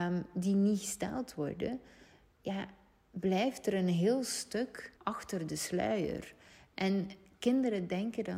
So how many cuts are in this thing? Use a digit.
1